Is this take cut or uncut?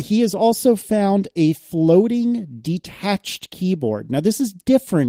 uncut